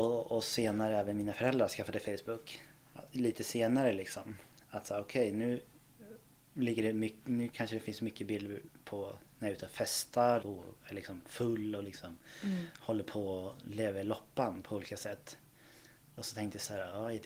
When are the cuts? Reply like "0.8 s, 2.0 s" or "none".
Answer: 10.4 s